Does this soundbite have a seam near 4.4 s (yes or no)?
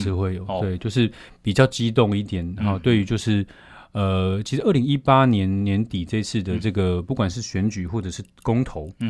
no